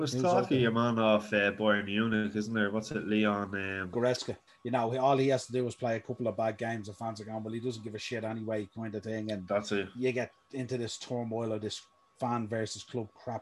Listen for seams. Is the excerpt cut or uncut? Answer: cut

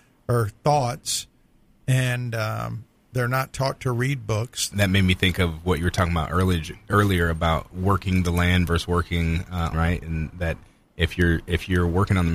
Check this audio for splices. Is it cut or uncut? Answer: cut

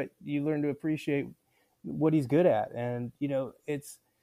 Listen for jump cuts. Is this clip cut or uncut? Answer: uncut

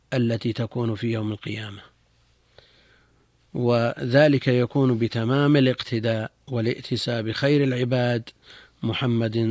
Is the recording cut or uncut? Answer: uncut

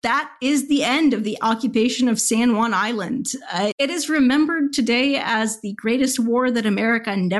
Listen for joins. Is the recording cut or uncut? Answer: cut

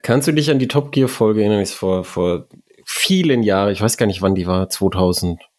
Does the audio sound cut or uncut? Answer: uncut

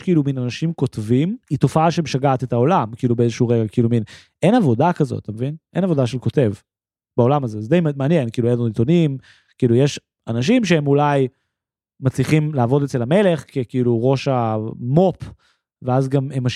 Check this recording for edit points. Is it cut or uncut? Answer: cut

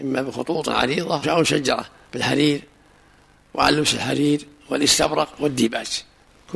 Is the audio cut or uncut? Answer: cut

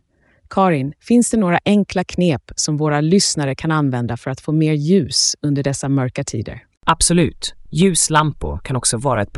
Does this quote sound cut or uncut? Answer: cut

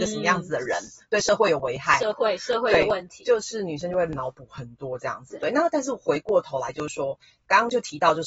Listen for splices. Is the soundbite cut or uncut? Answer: uncut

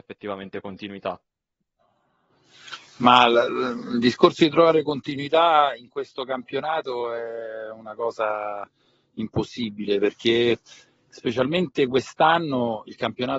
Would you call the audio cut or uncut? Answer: uncut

